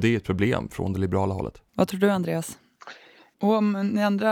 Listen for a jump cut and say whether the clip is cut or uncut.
cut